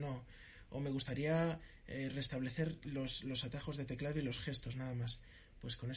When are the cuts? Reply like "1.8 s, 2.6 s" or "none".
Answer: none